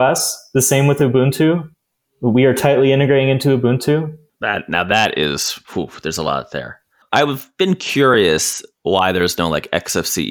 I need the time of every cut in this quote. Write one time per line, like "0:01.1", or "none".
0:04.3